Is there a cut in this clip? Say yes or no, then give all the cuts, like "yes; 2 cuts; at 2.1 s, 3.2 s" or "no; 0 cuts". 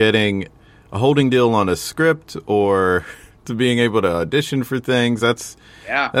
no; 0 cuts